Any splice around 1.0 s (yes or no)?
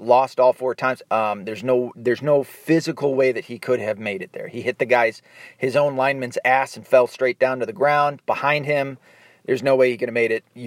yes